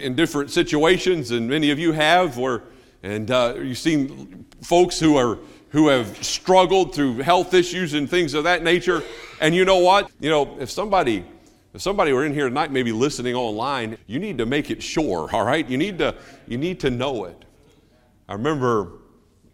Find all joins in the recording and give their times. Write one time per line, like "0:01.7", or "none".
0:10.1
0:14.0